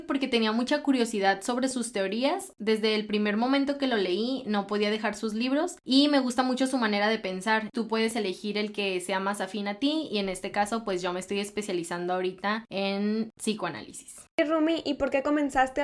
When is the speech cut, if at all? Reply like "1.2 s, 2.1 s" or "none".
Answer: 7.7 s